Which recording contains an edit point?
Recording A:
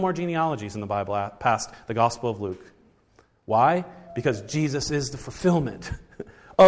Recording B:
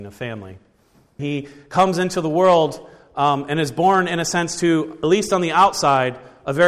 B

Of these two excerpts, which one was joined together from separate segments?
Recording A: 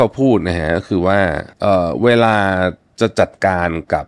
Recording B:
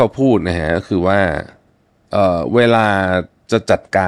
A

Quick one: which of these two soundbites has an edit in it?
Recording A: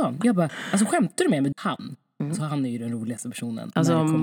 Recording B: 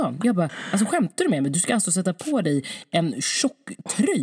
A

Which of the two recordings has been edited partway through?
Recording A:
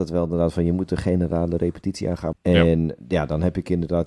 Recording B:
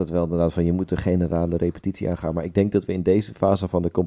A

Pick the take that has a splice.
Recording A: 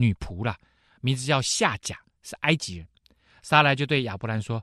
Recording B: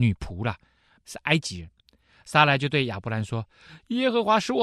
B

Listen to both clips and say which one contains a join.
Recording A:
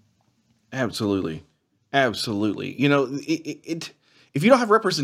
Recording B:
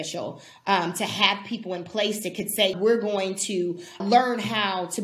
B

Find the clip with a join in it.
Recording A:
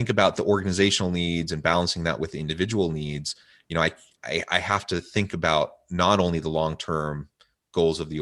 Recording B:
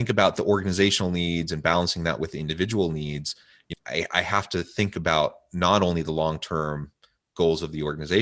B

